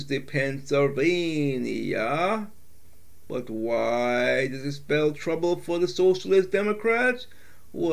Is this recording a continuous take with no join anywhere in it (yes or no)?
yes